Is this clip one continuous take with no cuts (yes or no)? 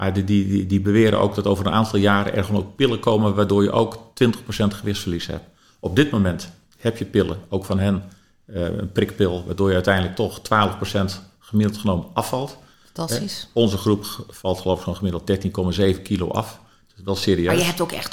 yes